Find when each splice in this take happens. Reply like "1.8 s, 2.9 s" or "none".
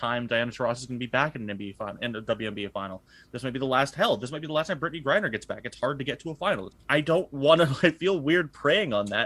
6.7 s, 7.8 s